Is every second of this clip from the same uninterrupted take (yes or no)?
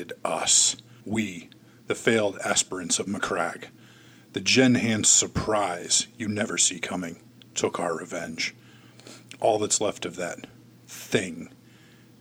no